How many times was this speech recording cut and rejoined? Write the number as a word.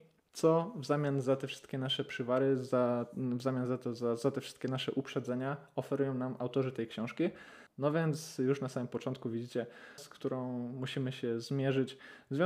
two